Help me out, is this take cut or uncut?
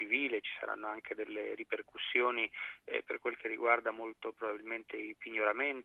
uncut